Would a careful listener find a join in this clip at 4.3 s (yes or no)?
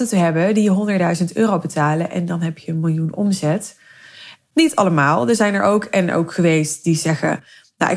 yes